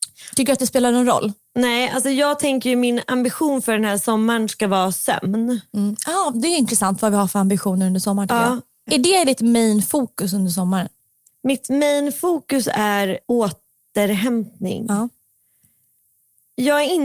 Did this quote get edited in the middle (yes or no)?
yes